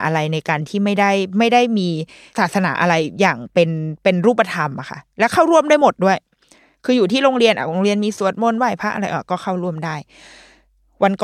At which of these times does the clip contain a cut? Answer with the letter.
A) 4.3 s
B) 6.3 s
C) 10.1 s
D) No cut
D